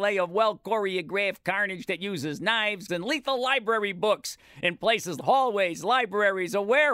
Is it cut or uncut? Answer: cut